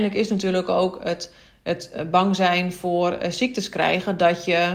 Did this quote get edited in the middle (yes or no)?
no